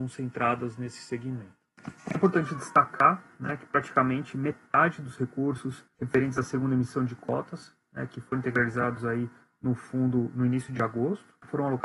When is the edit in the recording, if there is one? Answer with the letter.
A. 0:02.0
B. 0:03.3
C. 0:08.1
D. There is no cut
D